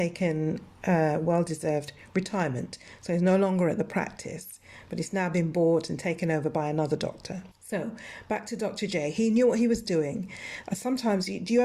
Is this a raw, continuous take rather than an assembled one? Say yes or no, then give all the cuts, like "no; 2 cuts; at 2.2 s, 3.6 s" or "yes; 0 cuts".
no; 2 cuts; at 7.5 s, 10.6 s